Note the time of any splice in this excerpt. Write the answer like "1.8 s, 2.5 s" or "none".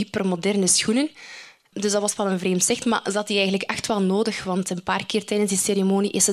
none